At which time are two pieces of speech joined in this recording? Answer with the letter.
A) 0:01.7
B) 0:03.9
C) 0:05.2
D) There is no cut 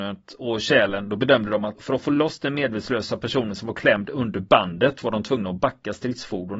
A